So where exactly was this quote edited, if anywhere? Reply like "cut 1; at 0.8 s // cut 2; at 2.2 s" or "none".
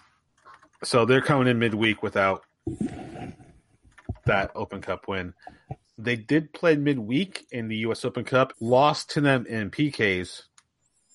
cut 1; at 4.6 s // cut 2; at 5.8 s // cut 3; at 8.5 s